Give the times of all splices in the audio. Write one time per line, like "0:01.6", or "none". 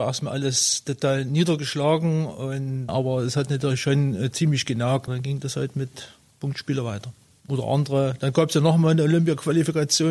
0:02.9
0:05.1